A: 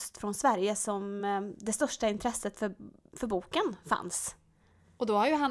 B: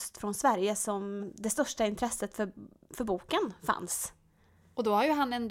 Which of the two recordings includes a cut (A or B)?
B